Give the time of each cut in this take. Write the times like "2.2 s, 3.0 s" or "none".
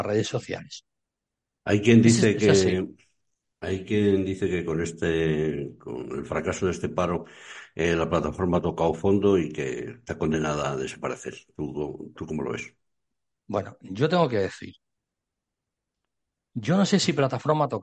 none

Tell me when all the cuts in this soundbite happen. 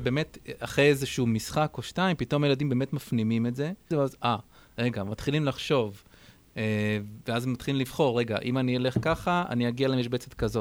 3.9 s

